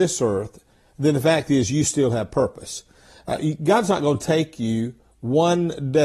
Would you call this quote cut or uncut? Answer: uncut